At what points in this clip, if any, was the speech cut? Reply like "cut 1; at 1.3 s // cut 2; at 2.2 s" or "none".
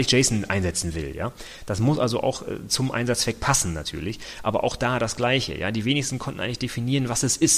none